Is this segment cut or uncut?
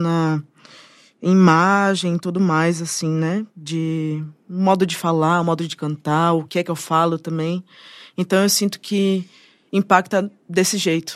uncut